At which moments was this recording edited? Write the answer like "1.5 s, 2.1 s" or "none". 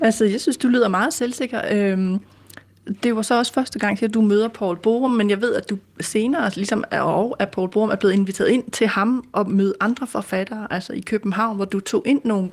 none